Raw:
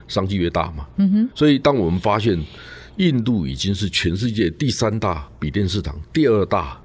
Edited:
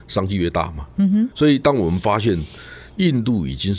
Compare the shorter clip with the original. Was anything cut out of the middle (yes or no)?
no